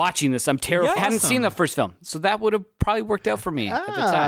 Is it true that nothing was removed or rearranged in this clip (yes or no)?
no